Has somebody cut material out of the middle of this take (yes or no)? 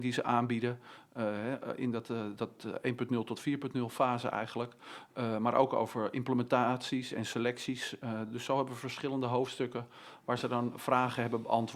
no